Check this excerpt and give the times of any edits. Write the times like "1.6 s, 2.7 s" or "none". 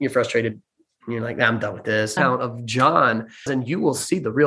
2.2 s, 3.5 s